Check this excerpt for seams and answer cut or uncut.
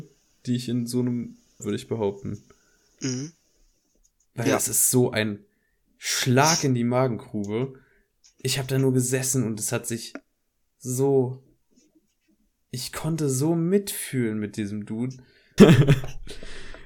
cut